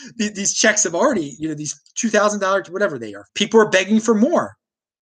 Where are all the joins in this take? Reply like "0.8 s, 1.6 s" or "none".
3.3 s